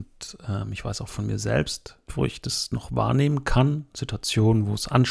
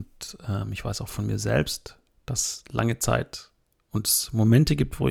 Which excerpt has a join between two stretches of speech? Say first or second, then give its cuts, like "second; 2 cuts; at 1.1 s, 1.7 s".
first; 1 cut; at 2.1 s